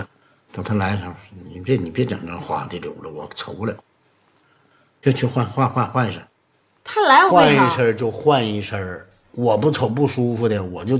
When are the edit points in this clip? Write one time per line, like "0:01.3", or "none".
0:07.3